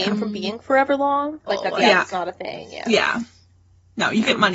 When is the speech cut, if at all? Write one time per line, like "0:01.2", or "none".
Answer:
0:01.5